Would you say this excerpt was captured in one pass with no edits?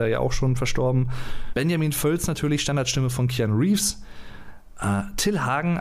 no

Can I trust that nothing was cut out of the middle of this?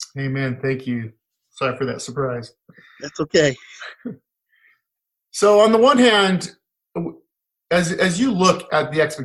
yes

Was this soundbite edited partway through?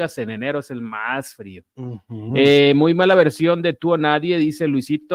no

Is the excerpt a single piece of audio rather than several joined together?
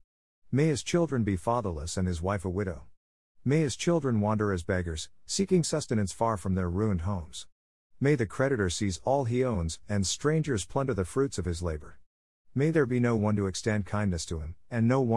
yes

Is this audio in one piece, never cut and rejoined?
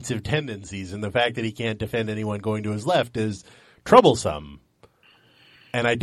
yes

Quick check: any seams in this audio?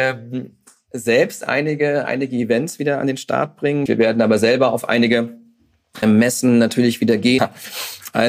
yes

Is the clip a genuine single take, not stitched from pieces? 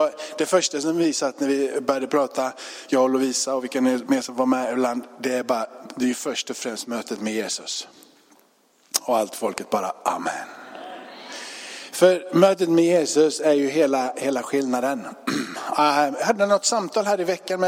yes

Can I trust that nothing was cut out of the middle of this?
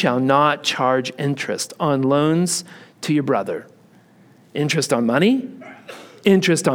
yes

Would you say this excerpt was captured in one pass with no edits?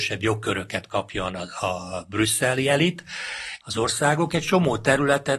no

